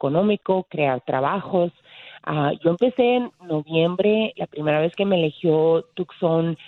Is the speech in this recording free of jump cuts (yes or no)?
yes